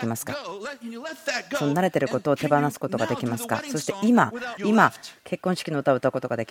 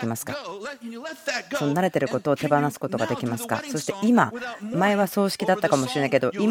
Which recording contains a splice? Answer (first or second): first